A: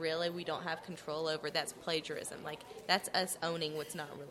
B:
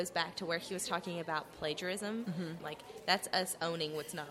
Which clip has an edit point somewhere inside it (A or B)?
B